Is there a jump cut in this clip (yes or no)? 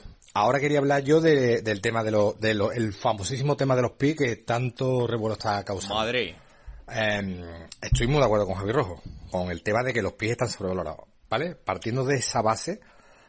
no